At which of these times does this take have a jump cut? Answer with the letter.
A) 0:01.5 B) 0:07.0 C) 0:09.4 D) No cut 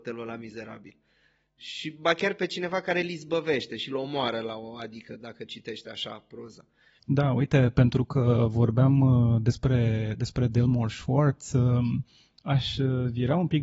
B